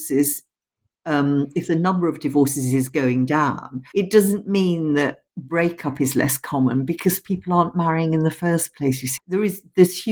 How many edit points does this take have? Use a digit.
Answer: 3